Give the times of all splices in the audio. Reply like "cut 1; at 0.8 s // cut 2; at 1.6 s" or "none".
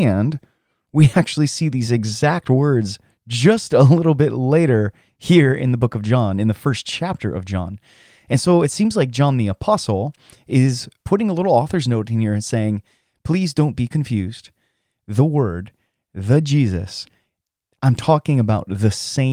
cut 1; at 11.0 s

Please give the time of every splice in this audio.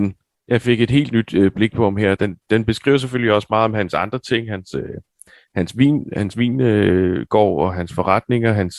none

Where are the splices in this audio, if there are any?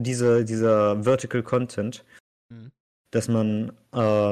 cut 1; at 2.9 s

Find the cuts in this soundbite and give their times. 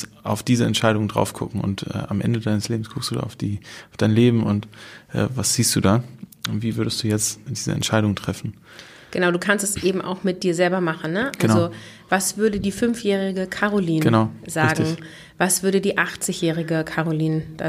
cut 1; at 7.5 s

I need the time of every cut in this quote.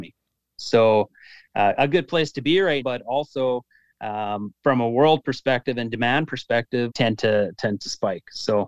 cut 1; at 2.8 s // cut 2; at 6.9 s

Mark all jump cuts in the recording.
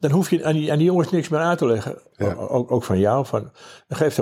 cut 1; at 2.1 s

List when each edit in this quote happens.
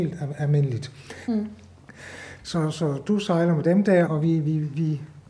cut 1; at 1.3 s // cut 2; at 2.4 s // cut 3; at 4.1 s

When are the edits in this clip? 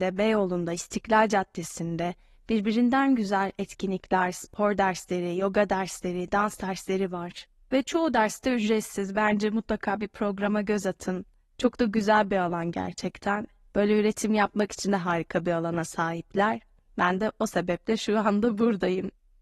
none

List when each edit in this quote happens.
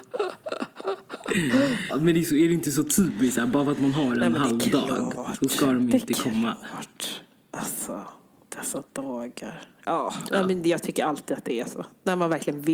cut 1; at 1.9 s

